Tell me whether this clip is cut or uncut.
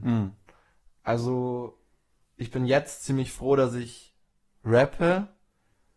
uncut